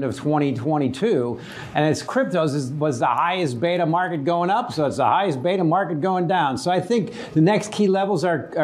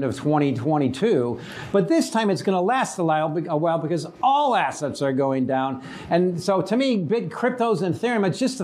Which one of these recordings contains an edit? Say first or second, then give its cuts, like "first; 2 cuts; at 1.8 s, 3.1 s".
second; 1 cut; at 1.7 s